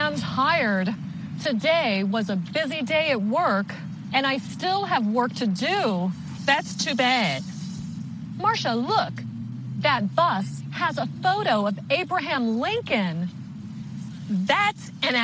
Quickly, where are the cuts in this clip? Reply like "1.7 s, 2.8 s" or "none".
6.4 s